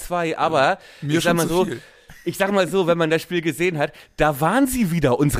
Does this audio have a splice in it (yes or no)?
no